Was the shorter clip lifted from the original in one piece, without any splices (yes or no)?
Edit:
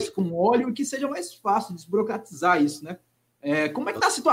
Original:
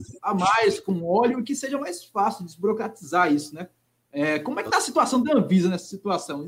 yes